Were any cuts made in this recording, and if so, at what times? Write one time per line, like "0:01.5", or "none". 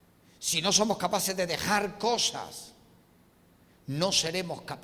none